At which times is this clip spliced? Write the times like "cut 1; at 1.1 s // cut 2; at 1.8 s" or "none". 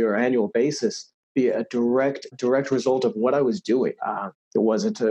cut 1; at 2.3 s // cut 2; at 4.0 s